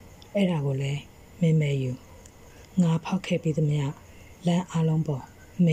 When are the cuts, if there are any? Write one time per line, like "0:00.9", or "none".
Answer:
0:02.7